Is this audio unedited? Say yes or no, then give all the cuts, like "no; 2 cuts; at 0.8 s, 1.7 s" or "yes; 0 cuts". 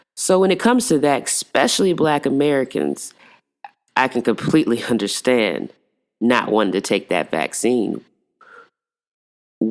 yes; 0 cuts